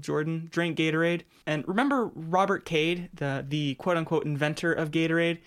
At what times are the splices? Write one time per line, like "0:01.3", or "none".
0:01.4